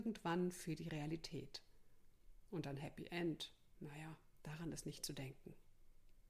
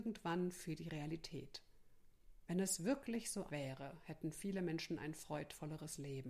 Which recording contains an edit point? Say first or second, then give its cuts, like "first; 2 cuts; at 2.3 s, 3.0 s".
second; 2 cuts; at 2.5 s, 3.5 s